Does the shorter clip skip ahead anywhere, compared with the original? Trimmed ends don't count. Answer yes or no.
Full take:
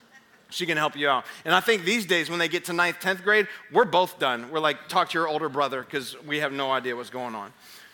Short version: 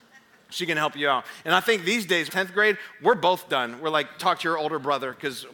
yes